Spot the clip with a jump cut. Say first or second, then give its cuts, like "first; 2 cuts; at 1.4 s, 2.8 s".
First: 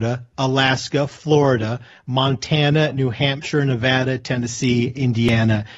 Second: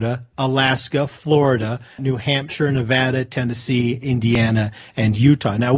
second; 1 cut; at 2.0 s